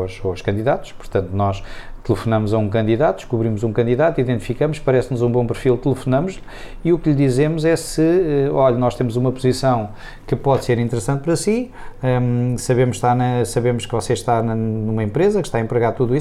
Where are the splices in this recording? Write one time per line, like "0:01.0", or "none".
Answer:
none